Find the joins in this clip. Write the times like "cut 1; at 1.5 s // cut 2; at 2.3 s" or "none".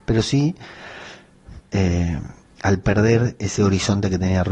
cut 1; at 1.6 s